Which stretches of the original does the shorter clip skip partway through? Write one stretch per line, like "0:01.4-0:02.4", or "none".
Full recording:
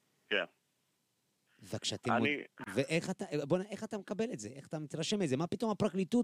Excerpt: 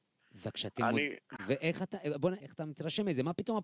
0:03.7-0:04.5

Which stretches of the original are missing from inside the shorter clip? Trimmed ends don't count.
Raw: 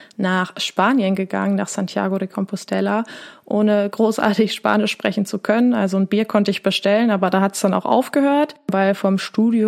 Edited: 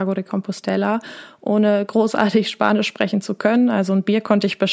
none

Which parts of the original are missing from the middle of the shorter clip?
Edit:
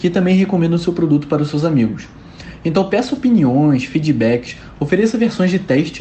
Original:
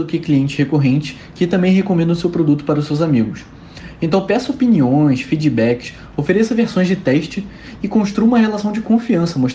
none

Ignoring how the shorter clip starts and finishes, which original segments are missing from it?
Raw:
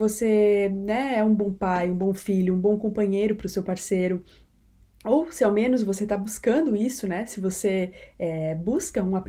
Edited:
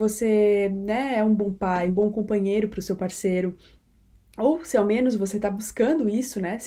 0:01.9-0:02.5

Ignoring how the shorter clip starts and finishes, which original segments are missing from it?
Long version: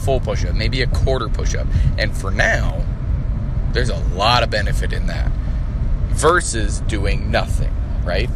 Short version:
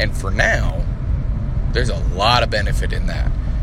none

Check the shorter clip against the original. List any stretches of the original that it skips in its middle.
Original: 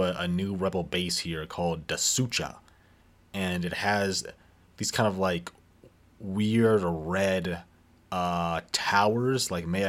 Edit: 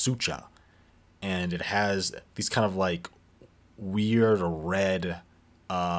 0:04.4-0:04.7

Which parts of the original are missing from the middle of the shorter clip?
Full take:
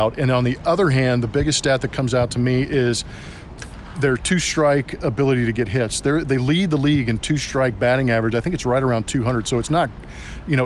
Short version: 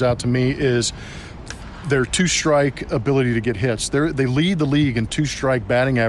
none

